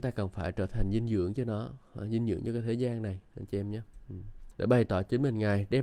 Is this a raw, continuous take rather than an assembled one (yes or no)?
no